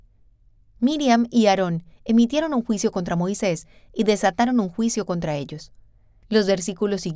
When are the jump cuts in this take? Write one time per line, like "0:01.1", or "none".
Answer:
none